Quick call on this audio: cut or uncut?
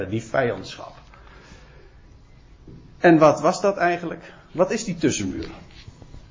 uncut